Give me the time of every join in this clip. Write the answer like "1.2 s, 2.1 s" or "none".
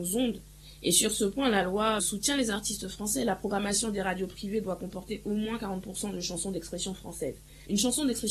2.0 s

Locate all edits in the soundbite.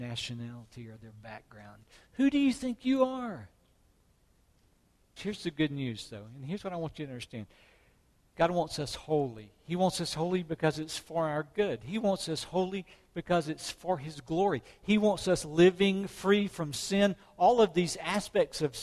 5.2 s

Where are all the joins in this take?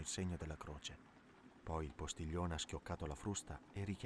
none

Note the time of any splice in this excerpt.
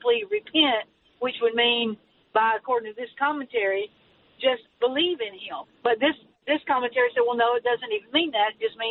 5.6 s

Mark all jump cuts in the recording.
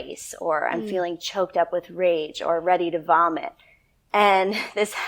none

